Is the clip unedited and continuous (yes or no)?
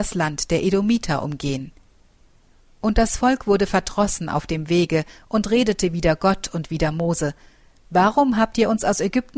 yes